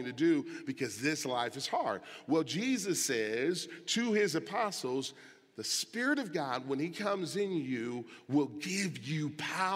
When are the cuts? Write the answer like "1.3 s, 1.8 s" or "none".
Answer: none